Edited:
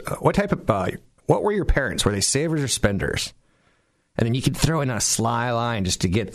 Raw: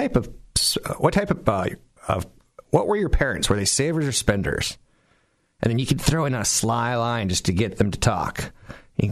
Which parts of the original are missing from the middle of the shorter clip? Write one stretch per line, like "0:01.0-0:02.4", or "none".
0:02.0-0:02.6

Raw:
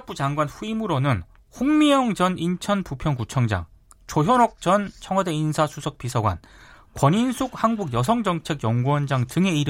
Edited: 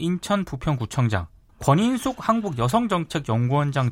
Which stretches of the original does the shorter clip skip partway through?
0:03.9-0:06.8

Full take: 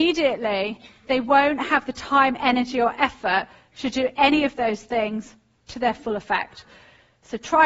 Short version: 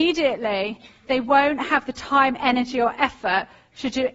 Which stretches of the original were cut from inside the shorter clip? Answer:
none

